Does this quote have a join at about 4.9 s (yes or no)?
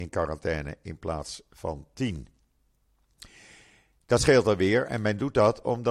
no